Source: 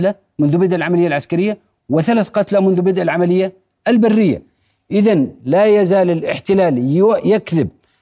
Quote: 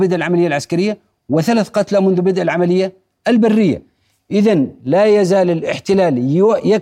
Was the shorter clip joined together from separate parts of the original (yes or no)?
no